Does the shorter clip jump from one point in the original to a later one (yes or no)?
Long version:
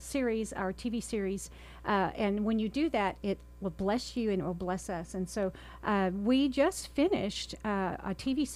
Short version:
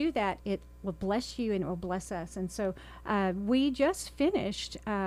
no